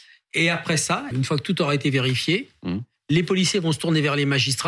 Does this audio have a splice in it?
yes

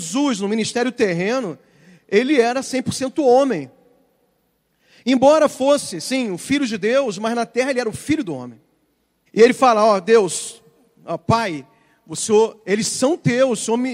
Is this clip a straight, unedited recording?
no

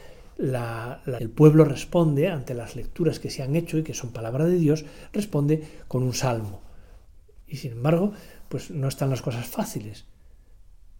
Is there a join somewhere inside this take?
yes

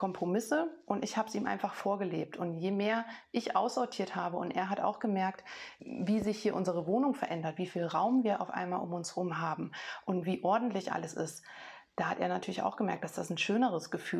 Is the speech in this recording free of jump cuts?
yes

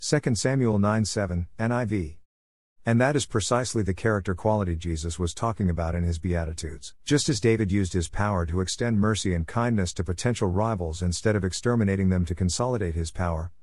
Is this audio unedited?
no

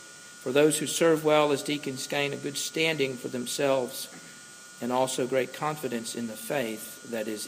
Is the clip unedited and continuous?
yes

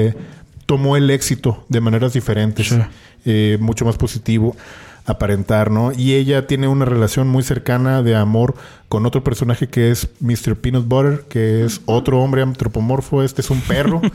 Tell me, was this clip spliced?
yes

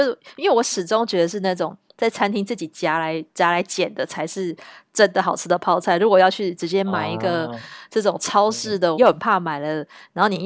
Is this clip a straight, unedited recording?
no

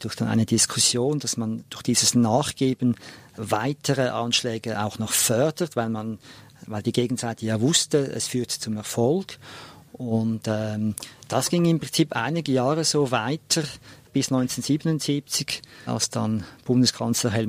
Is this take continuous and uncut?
yes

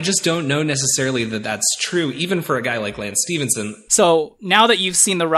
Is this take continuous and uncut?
no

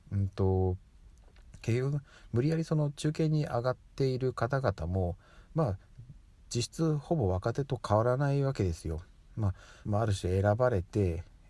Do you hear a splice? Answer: yes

